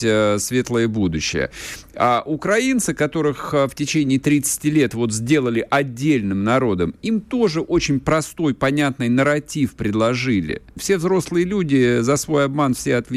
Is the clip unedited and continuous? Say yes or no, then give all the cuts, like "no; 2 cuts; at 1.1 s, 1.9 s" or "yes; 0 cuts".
no; 1 cut; at 10.8 s